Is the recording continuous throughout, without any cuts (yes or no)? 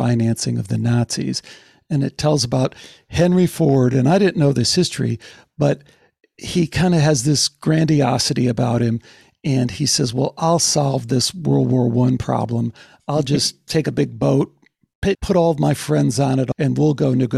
yes